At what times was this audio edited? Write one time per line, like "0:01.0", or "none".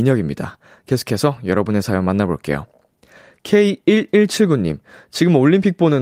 none